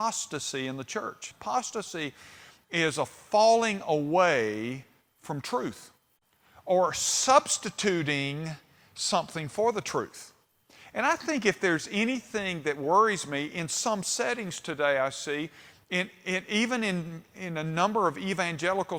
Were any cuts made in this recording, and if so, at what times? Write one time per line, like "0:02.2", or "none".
0:01.3